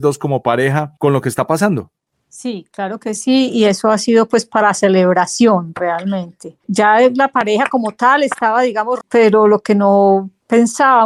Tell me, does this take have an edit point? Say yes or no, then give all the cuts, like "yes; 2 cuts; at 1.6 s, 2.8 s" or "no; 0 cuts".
yes; 2 cuts; at 6.6 s, 9.0 s